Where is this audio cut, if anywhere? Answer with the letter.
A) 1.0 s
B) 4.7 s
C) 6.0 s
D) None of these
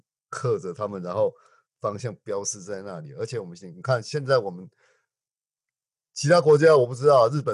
D